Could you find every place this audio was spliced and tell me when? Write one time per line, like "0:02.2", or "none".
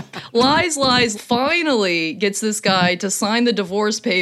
0:01.1